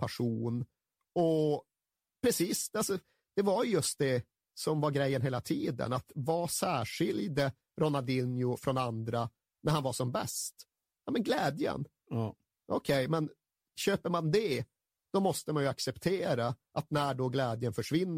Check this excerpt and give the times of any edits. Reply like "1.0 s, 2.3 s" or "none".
none